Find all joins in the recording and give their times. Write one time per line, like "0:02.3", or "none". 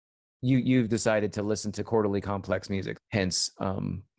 0:03.0